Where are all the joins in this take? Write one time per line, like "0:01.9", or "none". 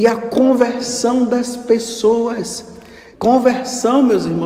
0:03.1